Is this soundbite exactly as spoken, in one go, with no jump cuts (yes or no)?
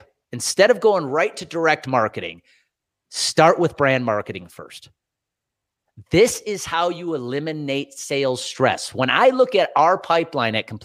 yes